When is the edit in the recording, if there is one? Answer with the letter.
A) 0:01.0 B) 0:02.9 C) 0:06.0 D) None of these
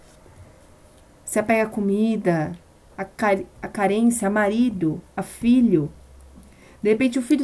B